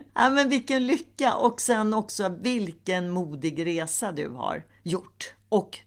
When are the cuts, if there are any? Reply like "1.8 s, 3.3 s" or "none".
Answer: none